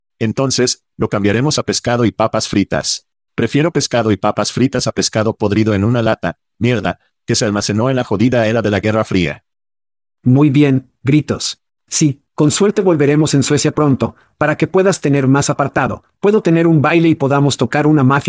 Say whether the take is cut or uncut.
cut